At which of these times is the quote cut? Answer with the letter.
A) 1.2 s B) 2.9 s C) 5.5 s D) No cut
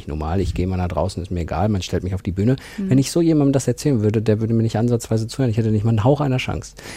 D